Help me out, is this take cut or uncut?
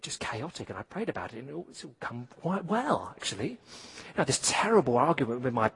uncut